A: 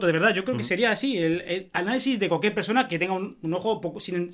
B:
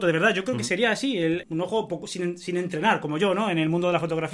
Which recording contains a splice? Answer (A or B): B